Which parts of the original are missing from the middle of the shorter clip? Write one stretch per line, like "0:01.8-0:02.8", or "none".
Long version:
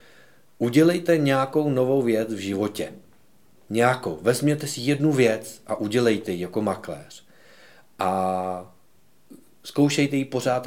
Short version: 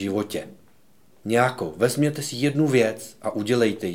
none